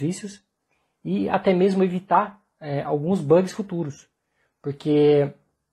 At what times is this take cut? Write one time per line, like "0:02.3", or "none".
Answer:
none